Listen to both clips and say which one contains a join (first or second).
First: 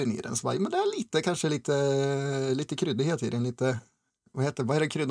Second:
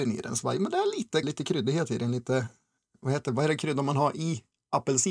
second